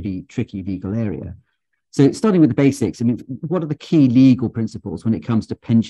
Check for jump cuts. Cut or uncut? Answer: cut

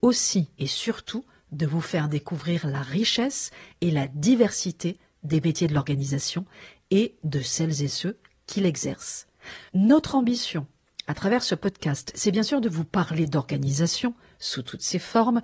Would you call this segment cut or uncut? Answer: cut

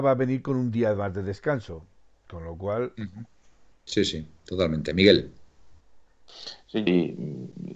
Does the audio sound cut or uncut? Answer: cut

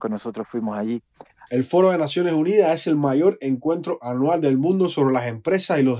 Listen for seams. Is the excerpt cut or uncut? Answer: cut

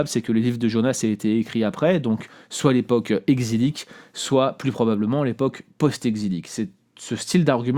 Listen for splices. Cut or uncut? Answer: uncut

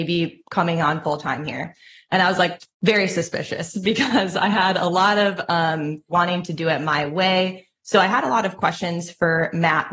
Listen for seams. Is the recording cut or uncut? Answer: cut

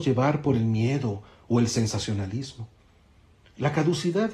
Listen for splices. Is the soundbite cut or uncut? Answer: uncut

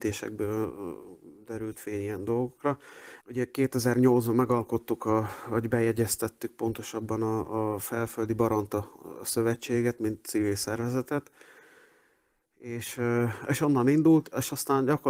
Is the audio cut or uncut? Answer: cut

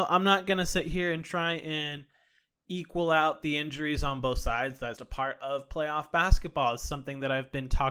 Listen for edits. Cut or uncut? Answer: cut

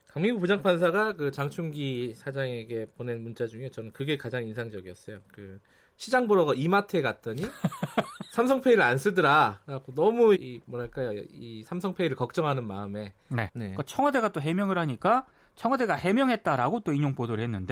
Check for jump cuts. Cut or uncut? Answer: cut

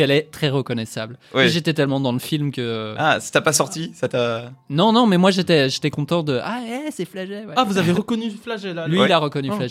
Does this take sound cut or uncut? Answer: uncut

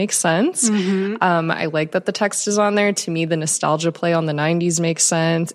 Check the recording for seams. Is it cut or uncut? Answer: uncut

